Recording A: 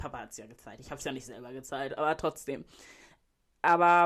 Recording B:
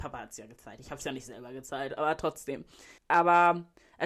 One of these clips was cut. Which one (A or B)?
B